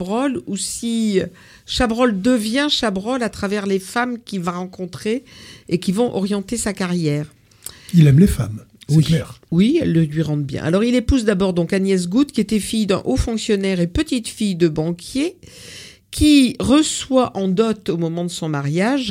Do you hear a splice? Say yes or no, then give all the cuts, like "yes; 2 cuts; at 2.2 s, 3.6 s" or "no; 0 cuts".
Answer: yes; 1 cut; at 9.5 s